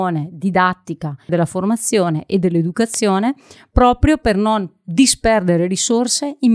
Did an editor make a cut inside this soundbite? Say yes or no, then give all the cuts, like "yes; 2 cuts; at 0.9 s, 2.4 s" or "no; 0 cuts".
yes; 1 cut; at 1.3 s